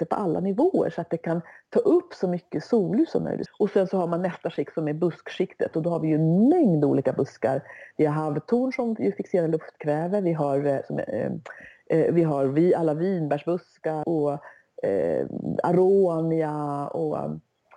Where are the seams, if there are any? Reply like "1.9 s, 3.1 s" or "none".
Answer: 3.5 s, 14.0 s

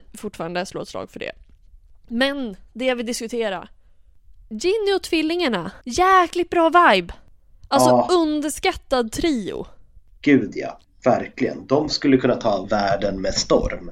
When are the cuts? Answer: 5.8 s, 10.8 s

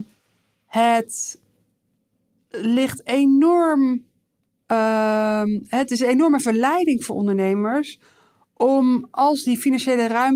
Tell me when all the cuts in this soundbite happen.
none

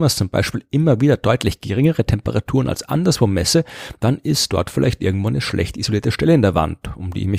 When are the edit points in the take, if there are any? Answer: none

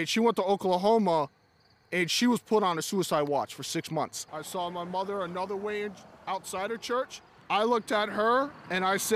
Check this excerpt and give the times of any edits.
4.3 s, 7.4 s

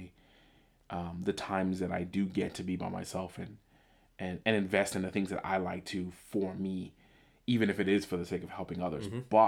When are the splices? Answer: none

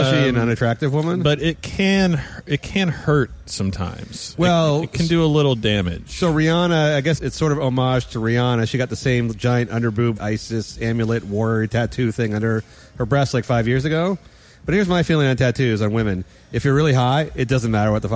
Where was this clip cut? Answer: 7.2 s, 10.2 s

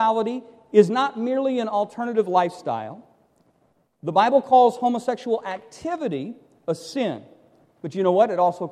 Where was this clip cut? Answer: none

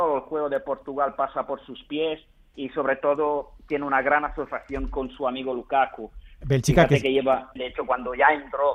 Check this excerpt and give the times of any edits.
6.4 s, 7.6 s

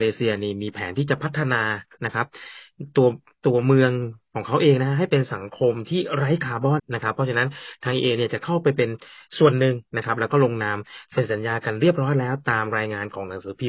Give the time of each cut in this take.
6.8 s

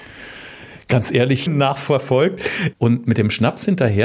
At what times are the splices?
1.5 s, 2.7 s

